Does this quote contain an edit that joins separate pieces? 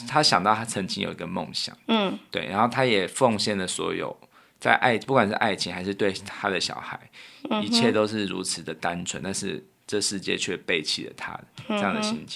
no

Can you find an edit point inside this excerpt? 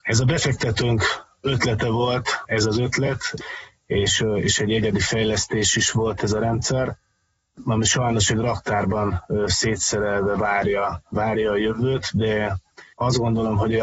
yes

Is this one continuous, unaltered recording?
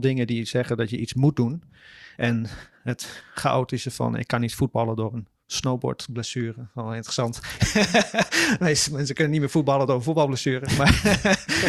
no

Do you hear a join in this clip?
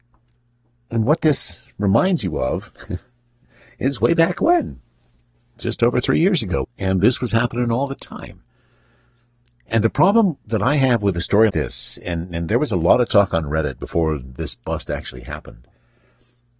yes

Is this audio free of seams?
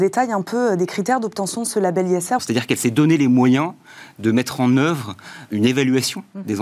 no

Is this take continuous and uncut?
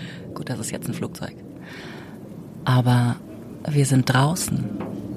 yes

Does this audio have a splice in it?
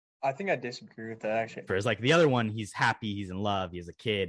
yes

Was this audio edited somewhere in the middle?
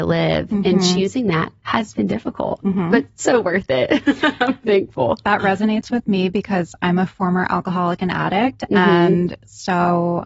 no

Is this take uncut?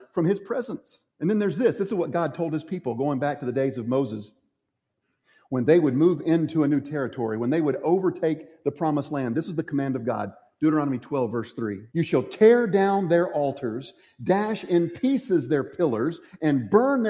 no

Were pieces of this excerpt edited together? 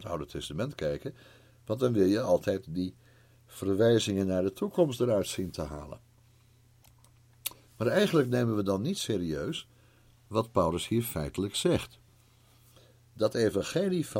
no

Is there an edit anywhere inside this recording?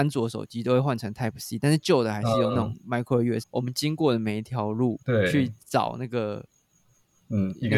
yes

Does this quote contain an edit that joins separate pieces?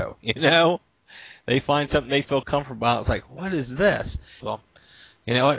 yes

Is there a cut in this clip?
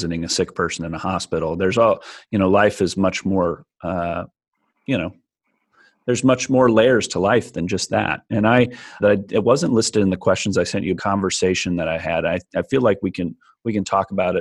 yes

